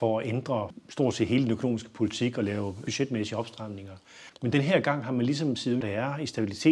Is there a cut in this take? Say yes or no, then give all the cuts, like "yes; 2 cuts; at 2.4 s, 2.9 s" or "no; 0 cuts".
yes; 2 cuts; at 4.3 s, 5.8 s